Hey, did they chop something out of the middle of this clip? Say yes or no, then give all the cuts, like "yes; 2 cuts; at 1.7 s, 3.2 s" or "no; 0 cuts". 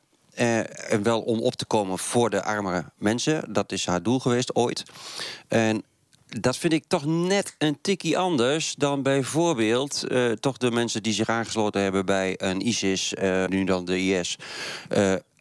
yes; 1 cut; at 13.5 s